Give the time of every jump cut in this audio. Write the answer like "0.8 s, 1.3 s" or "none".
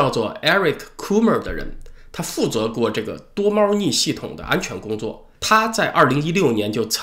5.4 s